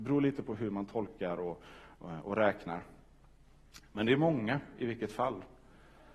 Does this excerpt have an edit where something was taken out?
no; 0 cuts

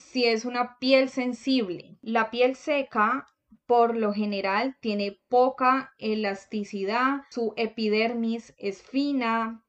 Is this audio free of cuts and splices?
yes; 0 cuts

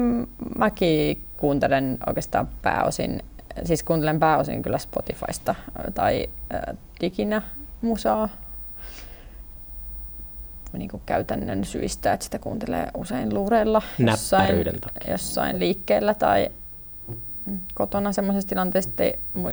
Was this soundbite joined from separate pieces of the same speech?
no; 0 cuts

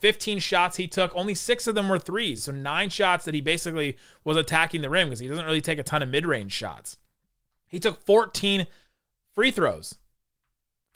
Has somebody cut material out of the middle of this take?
no; 0 cuts

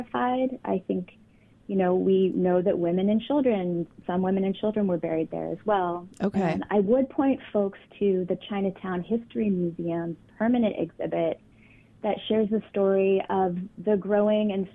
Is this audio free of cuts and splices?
no; 1 cut; at 6.1 s

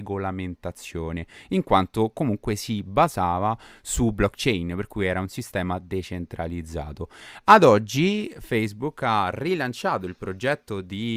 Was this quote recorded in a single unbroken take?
yes; 0 cuts

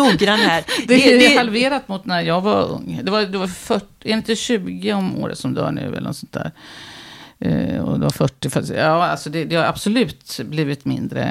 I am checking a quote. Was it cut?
no; 0 cuts

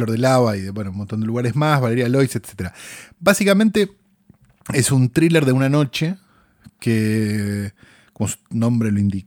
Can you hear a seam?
no; 0 cuts

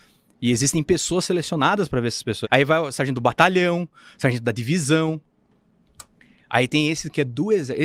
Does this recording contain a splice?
yes; 1 cut; at 2.4 s

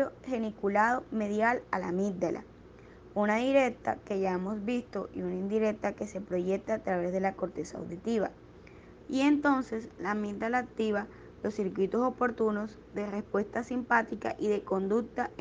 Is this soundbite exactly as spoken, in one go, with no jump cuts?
no; 1 cut; at 9.0 s

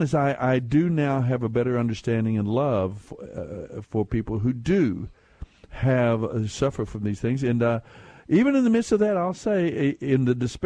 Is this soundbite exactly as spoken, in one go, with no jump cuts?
yes; 0 cuts

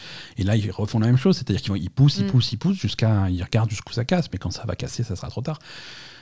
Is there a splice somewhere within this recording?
no; 0 cuts

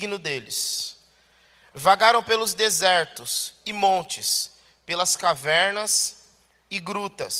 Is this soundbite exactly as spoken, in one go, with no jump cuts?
yes; 0 cuts

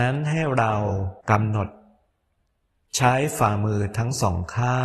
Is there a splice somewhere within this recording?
yes; 1 cut; at 1.2 s

